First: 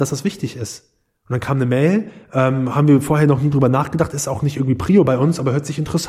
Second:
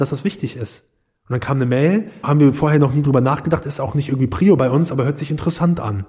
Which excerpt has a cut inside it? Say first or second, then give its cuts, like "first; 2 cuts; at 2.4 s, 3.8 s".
second; 1 cut; at 2.2 s